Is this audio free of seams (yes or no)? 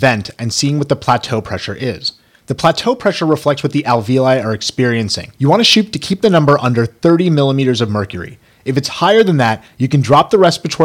no